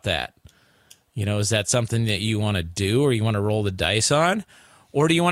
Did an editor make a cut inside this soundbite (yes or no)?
no